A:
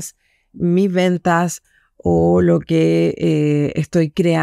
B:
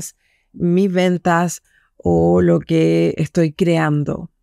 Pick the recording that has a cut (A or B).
B